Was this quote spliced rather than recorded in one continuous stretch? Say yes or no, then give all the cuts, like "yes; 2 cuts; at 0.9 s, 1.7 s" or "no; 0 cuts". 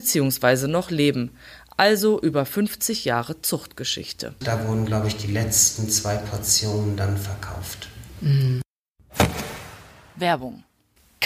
yes; 1 cut; at 4.4 s